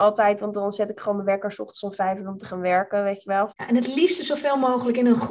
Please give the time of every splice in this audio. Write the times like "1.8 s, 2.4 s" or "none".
3.5 s